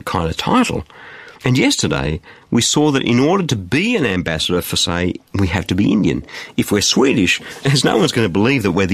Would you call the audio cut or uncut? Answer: cut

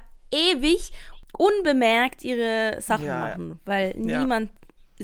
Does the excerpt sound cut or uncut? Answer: uncut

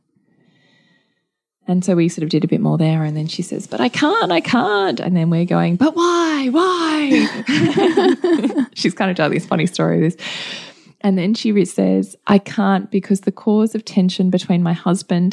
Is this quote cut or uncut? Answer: uncut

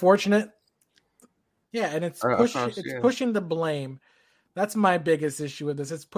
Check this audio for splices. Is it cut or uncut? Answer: cut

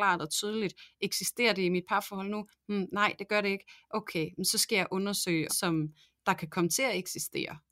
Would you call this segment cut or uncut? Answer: cut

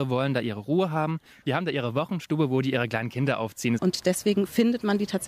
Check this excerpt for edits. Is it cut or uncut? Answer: cut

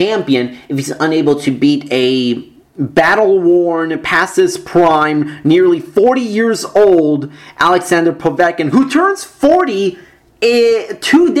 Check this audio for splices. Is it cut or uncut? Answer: uncut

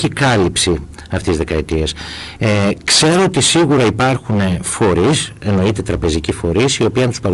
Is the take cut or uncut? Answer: uncut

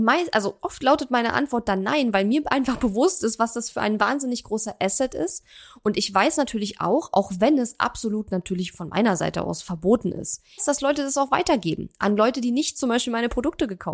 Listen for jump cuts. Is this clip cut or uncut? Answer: cut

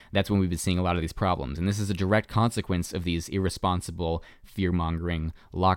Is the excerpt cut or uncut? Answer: uncut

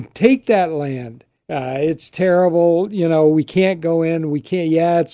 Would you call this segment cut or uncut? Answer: cut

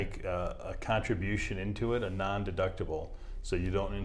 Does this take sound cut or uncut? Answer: uncut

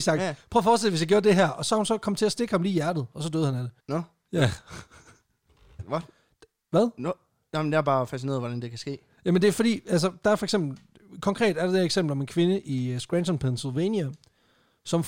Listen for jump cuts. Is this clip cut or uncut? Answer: cut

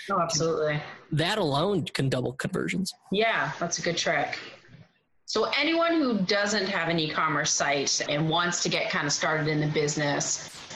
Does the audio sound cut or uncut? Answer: cut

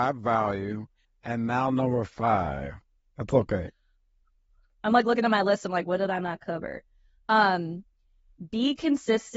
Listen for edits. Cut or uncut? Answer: uncut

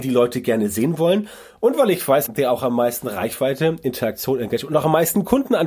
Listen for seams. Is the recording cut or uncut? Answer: cut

